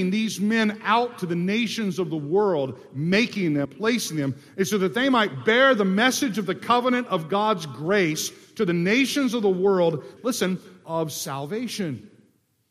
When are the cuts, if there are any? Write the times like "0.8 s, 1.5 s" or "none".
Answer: 3.6 s, 10.2 s